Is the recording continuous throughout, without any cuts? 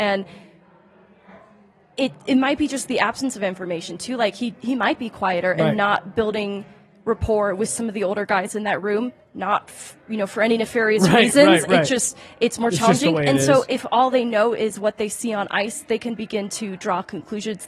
yes; 0 cuts

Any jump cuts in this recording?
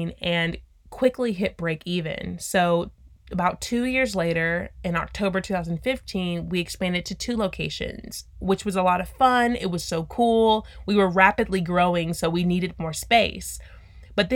no; 0 cuts

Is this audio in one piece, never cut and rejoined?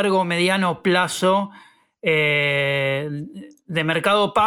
yes; 0 cuts

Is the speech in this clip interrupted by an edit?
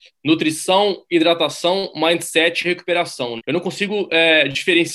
yes; 1 cut; at 3.4 s

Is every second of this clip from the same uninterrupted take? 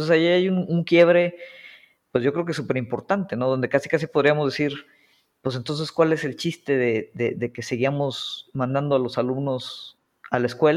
yes; 0 cuts

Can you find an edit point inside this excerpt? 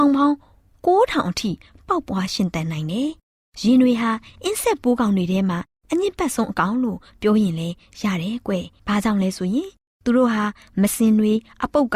no; 0 cuts

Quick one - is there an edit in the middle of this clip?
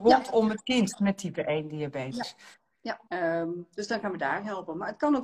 yes; 1 cut; at 3.1 s

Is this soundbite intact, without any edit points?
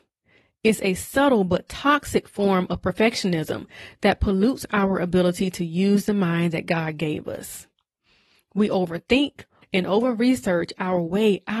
no; 1 cut; at 9.6 s

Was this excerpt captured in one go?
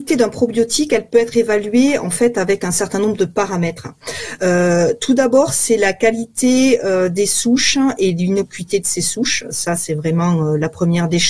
yes; 0 cuts

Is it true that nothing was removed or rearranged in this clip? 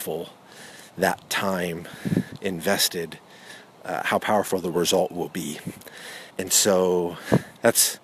no; 1 cut; at 6.3 s

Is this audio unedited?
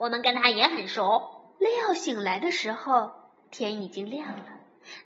no; 1 cut; at 1.6 s

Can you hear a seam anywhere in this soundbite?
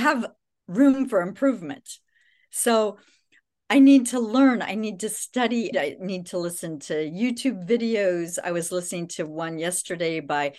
yes; 1 cut; at 5.7 s

